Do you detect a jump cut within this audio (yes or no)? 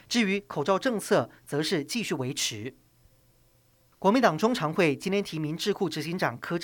no